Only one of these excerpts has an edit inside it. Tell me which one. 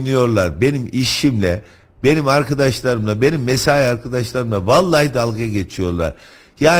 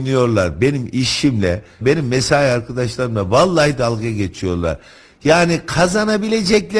second; 1 cut; at 1.8 s

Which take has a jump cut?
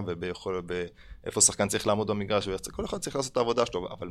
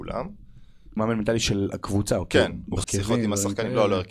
second; 2 cuts; at 1.0 s, 2.8 s

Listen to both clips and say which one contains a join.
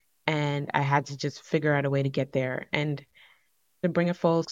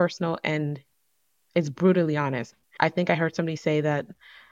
second; 1 cut; at 2.5 s

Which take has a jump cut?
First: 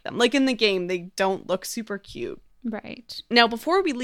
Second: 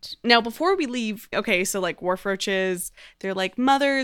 second; 1 cut; at 1.3 s

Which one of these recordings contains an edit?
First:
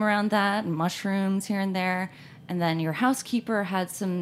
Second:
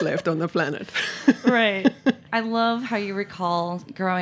second; 1 cut; at 2.3 s

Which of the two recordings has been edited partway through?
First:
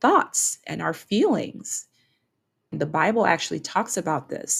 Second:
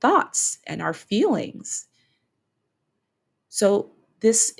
first; 1 cut; at 2.7 s

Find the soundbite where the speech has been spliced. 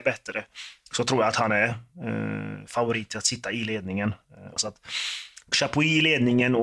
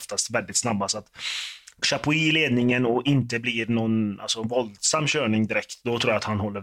first; 1 cut; at 4.6 s

